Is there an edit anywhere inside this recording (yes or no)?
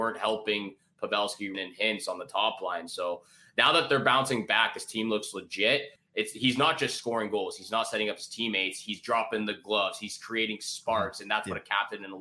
yes